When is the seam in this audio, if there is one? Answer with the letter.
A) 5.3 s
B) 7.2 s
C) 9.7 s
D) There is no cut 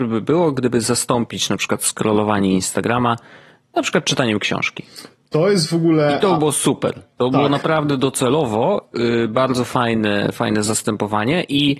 D